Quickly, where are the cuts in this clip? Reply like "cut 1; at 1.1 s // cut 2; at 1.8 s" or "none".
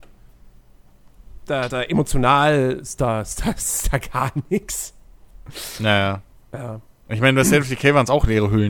none